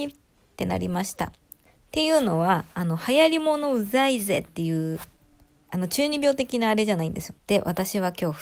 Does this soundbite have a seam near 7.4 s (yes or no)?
yes